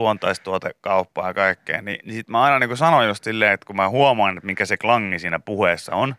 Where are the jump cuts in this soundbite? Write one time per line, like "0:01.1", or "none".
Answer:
0:02.0